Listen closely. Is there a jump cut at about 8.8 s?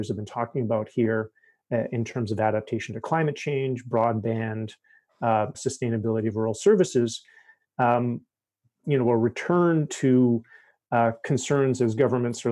yes; 2 cuts; at 5.5 s, 8.8 s

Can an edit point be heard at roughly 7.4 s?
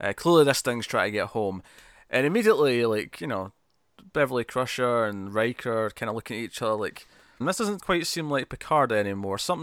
yes; 1 cut; at 7.4 s

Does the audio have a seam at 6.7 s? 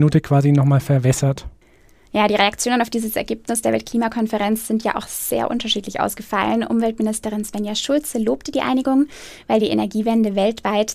no; 0 cuts

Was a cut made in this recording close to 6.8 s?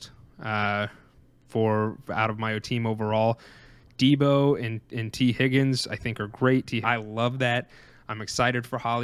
yes; 1 cut; at 6.8 s

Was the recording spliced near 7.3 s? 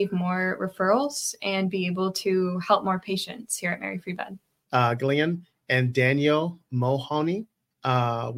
no; 1 cut; at 4.7 s

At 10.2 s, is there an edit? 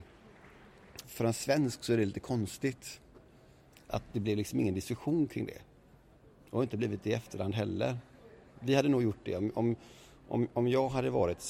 no; 1 cut; at 1.0 s

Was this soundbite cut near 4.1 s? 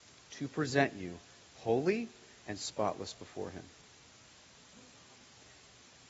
no; 1 cut; at 2.4 s

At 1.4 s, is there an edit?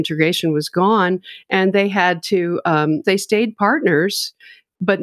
no; 1 cut; at 3.0 s

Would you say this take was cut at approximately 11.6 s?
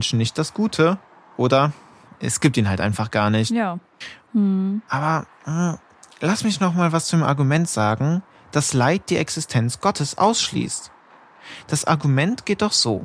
no; 1 cut; at 4.3 s

